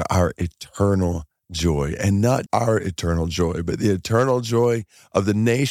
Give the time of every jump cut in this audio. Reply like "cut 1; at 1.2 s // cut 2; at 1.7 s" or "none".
cut 1; at 2.5 s